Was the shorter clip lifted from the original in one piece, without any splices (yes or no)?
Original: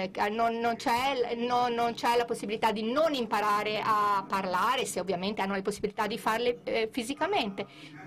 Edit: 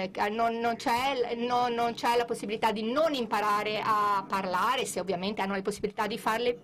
yes